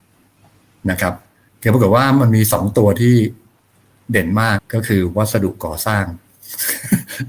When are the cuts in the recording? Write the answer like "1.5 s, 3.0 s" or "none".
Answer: 4.6 s